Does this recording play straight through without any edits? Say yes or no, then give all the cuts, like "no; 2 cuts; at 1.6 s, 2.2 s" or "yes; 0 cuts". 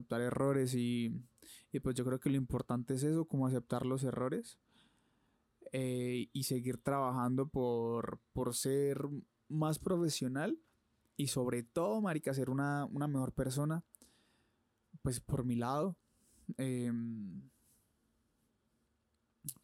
yes; 0 cuts